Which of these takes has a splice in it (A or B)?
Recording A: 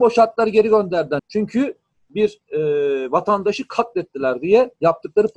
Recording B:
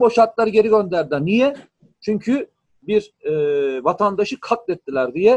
A